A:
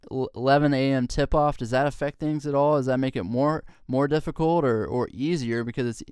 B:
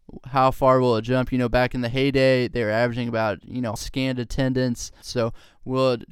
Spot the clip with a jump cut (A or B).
B